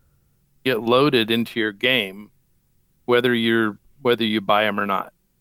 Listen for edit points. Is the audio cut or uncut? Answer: uncut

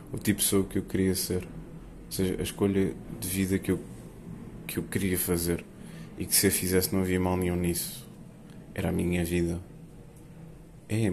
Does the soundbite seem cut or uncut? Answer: uncut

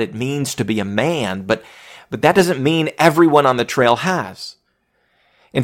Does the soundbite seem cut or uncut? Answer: uncut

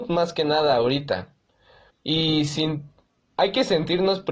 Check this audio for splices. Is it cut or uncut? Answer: cut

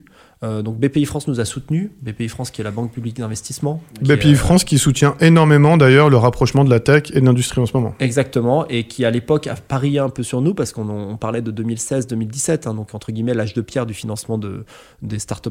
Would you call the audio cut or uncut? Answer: uncut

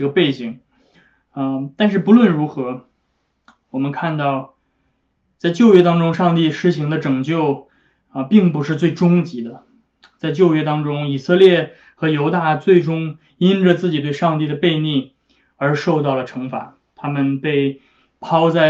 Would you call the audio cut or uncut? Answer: uncut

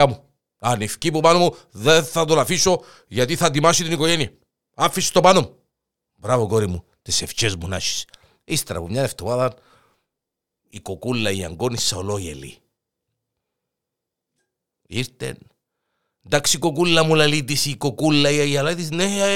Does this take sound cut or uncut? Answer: uncut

